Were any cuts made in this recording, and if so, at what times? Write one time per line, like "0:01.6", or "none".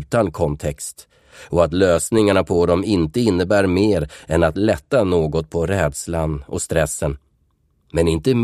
none